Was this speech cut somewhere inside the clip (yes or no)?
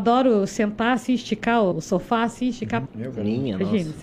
yes